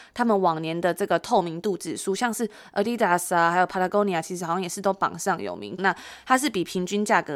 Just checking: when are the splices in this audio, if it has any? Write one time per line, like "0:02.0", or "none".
0:05.8